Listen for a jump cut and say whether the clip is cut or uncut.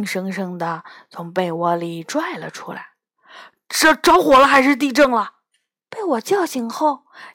uncut